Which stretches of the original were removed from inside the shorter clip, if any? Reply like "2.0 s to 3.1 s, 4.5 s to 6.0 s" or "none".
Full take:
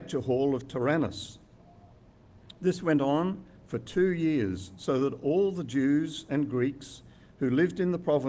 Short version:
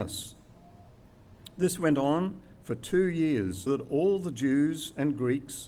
4.7 s to 5.0 s